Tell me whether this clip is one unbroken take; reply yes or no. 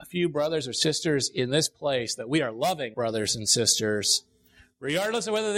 no